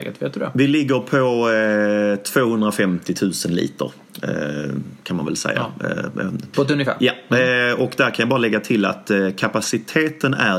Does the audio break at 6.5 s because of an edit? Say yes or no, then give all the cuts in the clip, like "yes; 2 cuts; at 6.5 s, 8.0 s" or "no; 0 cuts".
yes; 1 cut; at 6.5 s